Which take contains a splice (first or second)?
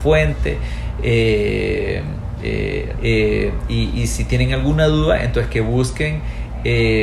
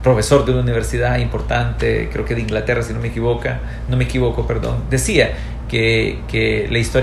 first